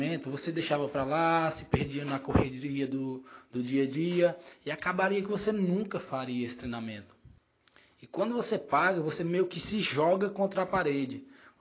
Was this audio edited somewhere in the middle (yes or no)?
no